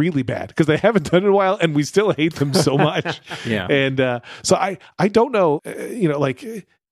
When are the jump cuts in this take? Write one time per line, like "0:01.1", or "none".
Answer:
0:05.6